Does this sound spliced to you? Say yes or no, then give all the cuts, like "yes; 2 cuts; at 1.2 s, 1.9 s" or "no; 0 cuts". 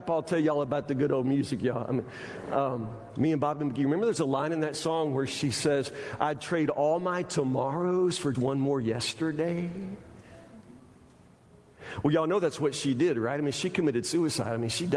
yes; 1 cut; at 8.3 s